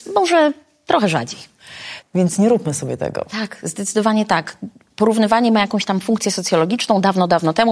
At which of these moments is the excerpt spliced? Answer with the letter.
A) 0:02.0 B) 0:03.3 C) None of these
A